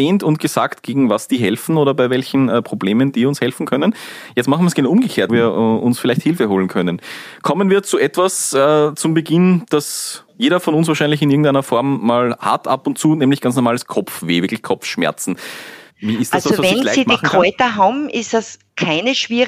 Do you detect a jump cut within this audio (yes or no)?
yes